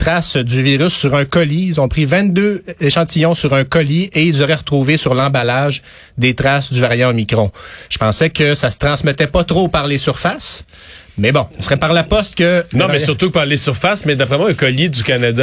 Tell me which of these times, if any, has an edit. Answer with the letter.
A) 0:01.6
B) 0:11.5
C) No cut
B